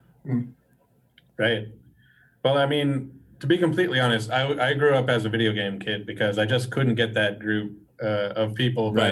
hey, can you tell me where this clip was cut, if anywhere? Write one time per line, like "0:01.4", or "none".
none